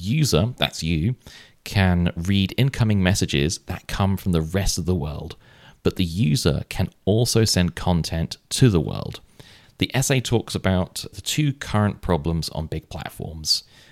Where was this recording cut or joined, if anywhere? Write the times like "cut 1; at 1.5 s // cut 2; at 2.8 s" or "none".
cut 1; at 9.6 s // cut 2; at 11.1 s